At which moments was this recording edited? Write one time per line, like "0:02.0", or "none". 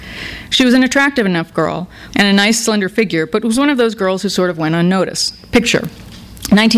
0:02.1